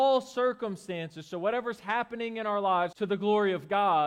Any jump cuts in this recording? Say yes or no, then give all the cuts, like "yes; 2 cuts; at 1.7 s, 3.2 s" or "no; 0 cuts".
yes; 1 cut; at 2.9 s